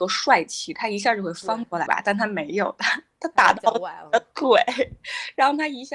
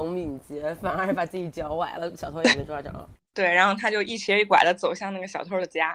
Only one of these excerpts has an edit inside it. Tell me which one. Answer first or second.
first